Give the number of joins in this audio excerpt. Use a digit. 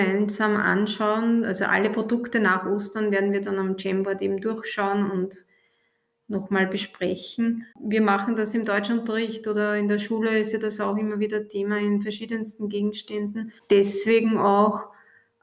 2